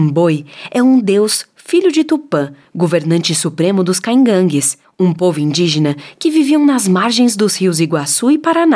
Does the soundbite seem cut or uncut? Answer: uncut